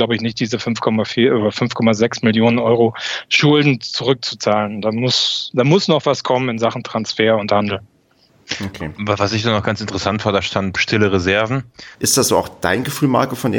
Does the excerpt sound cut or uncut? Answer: cut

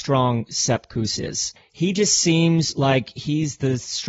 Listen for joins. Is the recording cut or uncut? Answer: uncut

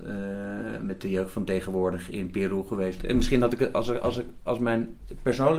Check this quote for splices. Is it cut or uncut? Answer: cut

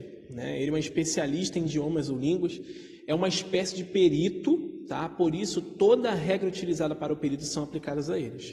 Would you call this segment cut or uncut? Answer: uncut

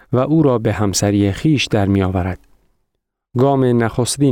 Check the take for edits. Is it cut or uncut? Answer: uncut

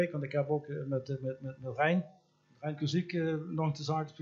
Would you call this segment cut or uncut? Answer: uncut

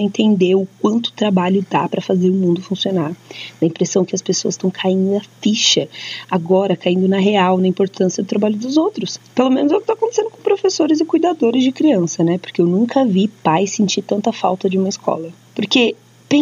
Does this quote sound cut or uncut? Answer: uncut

